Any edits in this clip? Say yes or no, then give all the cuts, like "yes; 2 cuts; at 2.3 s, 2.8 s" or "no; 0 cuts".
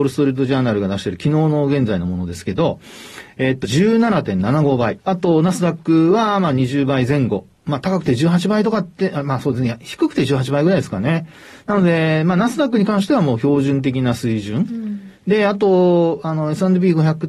yes; 2 cuts; at 3.6 s, 5.0 s